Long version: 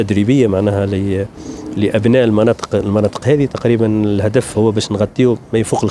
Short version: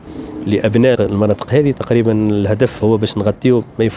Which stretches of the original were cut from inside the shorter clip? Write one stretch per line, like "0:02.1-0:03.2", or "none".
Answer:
0:02.2-0:02.7